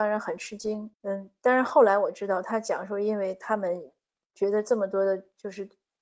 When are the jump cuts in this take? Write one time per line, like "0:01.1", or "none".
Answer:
0:00.9